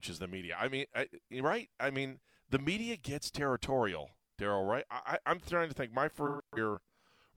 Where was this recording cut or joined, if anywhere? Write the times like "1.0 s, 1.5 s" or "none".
none